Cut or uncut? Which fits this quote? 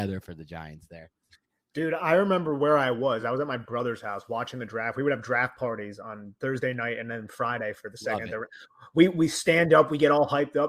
uncut